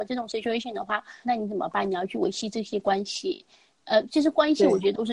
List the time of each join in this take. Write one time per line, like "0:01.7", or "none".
0:01.2